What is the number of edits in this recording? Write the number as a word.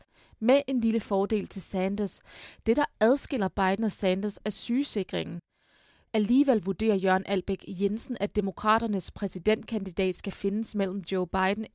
one